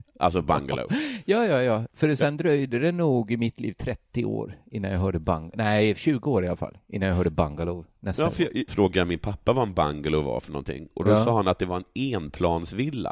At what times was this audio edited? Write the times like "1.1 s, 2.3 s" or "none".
8.7 s